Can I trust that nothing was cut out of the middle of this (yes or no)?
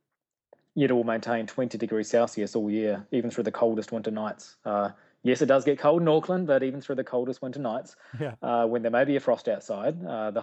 yes